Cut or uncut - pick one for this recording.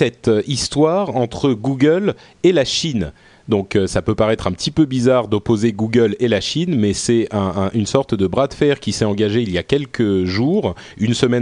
uncut